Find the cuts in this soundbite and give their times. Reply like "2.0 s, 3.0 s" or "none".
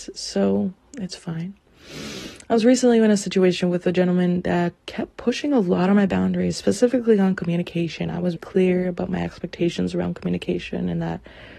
4.8 s, 8.4 s